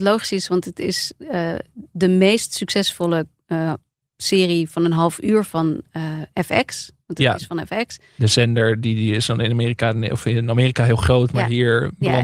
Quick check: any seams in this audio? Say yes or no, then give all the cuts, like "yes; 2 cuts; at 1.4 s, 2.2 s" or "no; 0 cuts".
no; 0 cuts